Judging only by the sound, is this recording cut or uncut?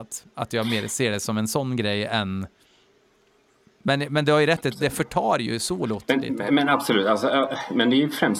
uncut